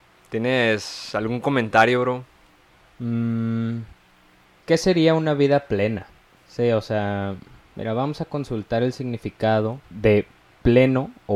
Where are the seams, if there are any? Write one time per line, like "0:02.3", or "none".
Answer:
0:04.6
0:06.4